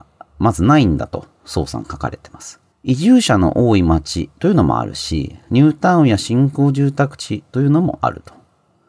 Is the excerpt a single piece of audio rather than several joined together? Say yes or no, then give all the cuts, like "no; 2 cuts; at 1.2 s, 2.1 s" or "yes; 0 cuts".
no; 1 cut; at 2.7 s